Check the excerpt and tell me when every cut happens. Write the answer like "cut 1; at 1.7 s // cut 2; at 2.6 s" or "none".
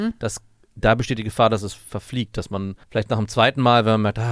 cut 1; at 2.8 s